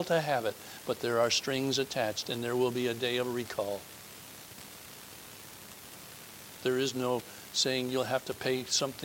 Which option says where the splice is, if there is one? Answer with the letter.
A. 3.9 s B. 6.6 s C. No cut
B